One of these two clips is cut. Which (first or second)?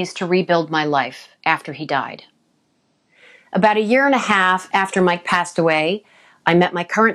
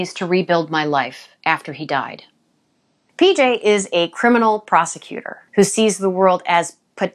second